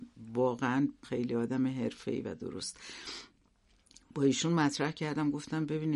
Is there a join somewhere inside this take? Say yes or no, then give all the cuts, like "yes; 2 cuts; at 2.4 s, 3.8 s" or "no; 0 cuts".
yes; 1 cut; at 1.0 s